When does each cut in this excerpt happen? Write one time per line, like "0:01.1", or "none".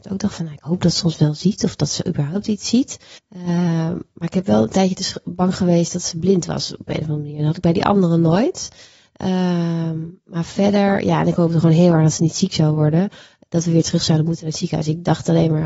0:03.2